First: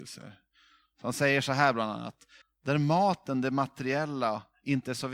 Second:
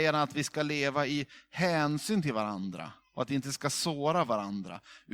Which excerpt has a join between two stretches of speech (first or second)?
first